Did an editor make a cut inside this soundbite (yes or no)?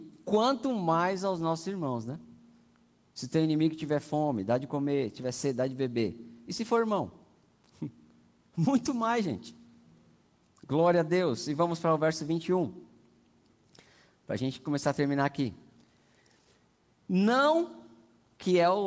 no